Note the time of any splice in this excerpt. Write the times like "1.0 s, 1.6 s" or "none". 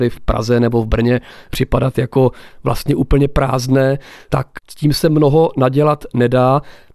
none